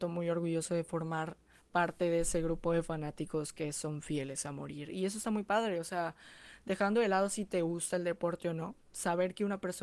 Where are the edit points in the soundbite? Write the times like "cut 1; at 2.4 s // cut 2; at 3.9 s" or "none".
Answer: none